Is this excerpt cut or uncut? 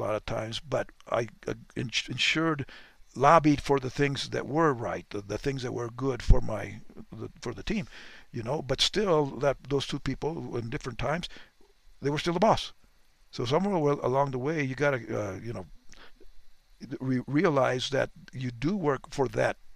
cut